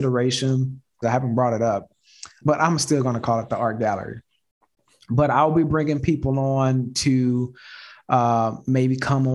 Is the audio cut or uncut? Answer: cut